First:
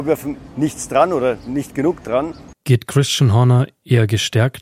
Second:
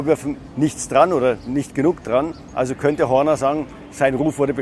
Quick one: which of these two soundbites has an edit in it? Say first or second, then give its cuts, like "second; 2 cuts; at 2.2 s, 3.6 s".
first; 1 cut; at 2.5 s